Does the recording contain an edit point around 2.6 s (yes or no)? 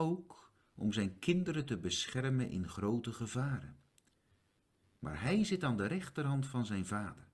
no